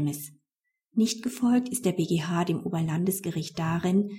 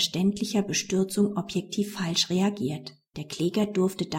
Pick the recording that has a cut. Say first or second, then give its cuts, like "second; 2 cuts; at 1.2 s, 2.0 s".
second; 1 cut; at 3.1 s